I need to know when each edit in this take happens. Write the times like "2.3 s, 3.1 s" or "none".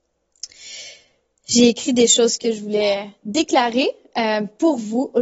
none